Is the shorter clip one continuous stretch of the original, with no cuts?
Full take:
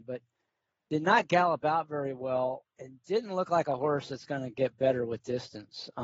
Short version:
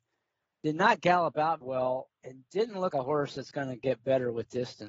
no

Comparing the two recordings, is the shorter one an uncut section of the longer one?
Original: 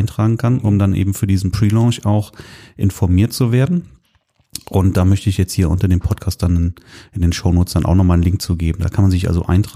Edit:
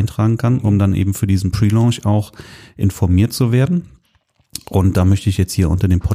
yes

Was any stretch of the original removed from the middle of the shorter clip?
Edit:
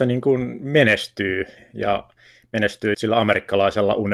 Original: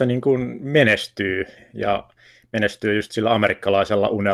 yes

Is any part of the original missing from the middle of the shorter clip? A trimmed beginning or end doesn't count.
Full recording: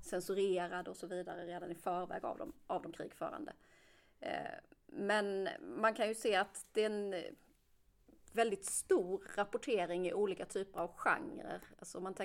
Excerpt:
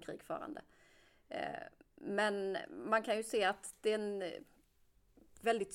no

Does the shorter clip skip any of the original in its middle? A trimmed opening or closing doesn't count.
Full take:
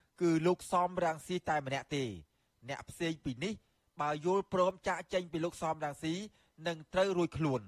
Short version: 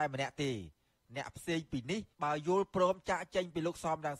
yes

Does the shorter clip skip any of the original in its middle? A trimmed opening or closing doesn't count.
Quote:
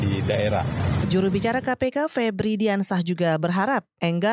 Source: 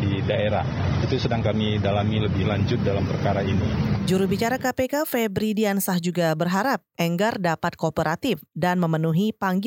yes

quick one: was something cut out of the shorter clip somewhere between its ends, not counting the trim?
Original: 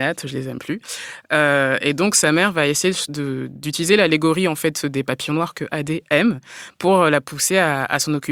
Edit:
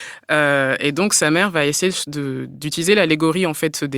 no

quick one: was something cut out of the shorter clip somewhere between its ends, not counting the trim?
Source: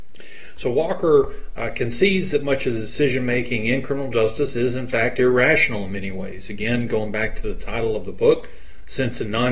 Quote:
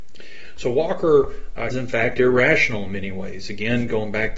yes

